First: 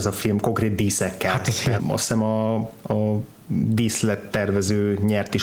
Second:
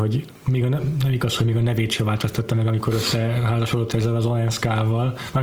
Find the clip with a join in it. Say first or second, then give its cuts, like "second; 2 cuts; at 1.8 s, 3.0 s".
first; 1 cut; at 1.8 s